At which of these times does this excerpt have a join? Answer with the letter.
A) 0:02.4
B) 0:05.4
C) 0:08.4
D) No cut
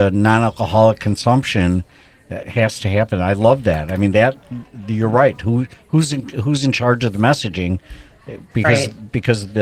A